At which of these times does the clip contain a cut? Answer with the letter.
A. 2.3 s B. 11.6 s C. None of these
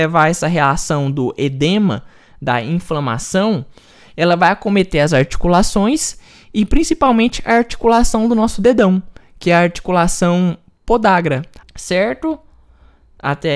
B